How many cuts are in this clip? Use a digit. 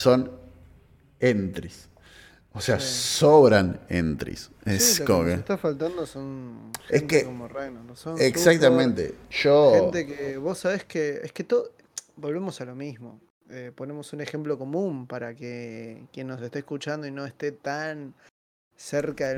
0